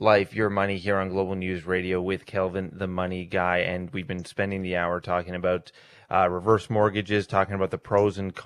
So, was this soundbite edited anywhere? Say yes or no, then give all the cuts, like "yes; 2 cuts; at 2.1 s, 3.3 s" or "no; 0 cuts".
no; 0 cuts